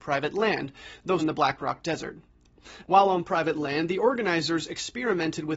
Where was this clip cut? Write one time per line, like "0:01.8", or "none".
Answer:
0:01.2
0:02.8